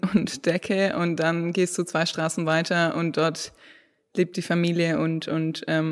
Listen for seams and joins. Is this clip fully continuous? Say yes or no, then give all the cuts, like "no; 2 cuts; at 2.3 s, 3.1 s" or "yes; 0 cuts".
yes; 0 cuts